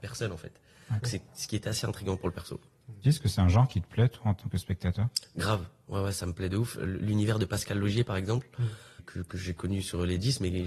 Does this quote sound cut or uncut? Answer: cut